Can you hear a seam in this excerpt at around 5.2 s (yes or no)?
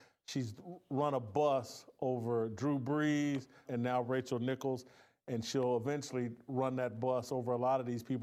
no